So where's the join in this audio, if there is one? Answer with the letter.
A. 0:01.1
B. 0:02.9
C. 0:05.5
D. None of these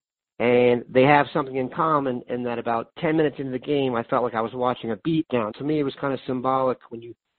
C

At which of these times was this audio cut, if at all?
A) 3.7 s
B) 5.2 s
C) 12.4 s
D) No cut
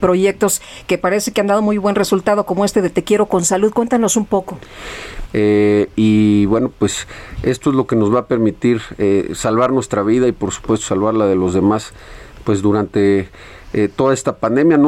B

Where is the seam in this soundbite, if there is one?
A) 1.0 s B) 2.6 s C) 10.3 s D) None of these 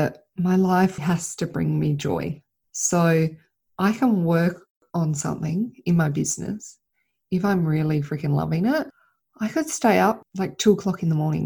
A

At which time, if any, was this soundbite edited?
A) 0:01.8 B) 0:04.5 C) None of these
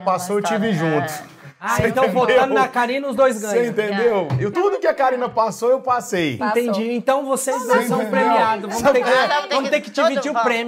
B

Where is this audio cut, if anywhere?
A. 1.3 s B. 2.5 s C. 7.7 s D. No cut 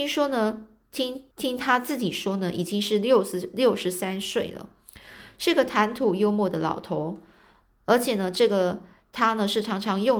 A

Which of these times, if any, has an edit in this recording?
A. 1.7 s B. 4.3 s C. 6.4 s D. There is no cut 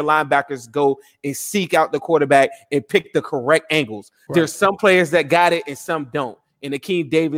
B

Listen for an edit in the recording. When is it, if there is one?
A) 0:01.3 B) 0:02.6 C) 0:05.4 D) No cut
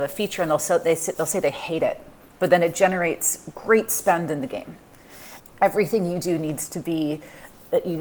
C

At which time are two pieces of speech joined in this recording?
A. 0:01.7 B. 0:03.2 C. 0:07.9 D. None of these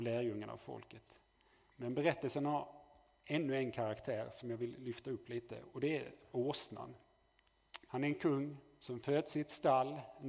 C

